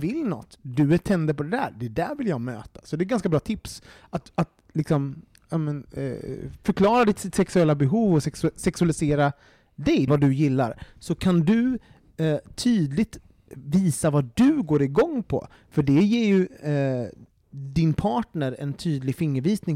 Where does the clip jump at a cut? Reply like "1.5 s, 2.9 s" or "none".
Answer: 10.1 s